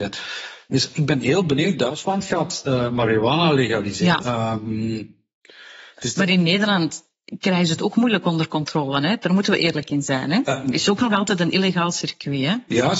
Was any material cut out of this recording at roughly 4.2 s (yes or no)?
yes